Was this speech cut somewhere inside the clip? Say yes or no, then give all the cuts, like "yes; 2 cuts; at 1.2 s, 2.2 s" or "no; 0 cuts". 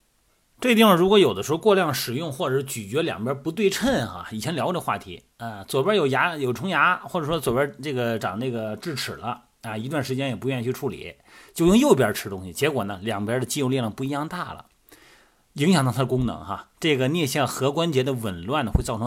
yes; 1 cut; at 8.2 s